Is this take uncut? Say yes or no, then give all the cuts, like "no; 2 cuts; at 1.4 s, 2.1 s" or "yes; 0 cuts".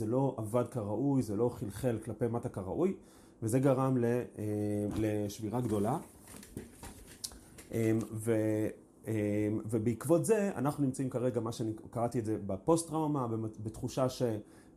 yes; 0 cuts